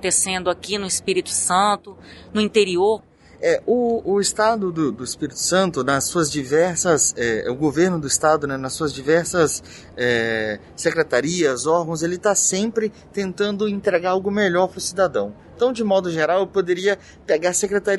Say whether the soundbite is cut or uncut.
cut